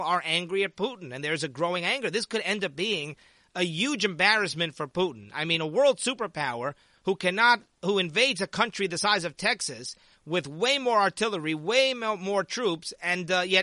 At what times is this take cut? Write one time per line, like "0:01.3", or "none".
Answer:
none